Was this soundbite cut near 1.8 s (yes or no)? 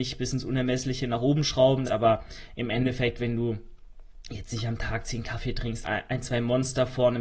yes